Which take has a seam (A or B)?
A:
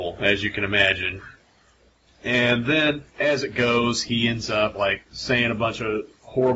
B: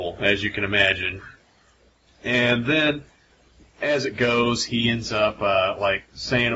A